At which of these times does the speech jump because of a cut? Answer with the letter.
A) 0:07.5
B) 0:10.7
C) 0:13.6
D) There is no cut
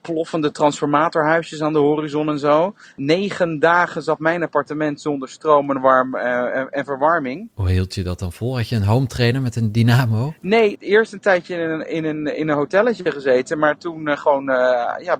B